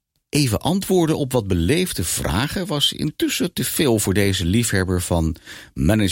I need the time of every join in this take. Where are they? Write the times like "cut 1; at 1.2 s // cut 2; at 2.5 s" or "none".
none